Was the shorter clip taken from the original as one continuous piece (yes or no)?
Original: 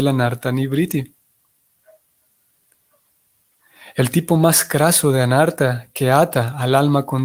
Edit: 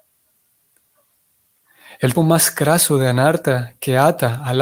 no